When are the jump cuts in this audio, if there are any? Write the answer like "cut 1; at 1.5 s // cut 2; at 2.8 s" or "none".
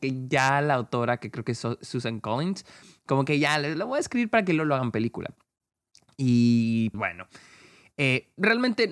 cut 1; at 6.9 s